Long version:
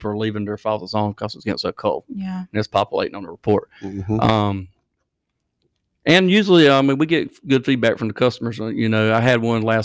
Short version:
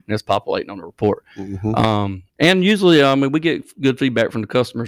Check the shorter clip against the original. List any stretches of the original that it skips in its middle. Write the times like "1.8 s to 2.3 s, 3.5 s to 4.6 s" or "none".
4.7 s to 6.0 s